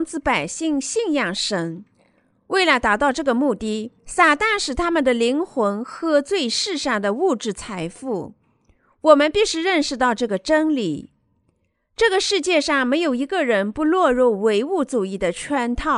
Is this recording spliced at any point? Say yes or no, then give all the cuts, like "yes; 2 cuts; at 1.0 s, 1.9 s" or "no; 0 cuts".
yes; 1 cut; at 4.0 s